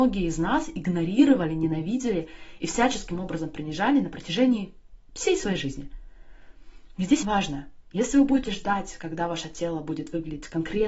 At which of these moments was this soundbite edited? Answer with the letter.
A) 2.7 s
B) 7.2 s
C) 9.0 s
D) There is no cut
B